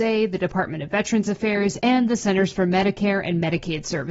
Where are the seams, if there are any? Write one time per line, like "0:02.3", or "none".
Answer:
none